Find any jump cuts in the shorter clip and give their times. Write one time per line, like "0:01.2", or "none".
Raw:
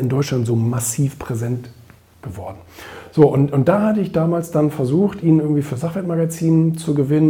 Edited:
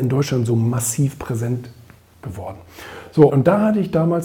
0:03.3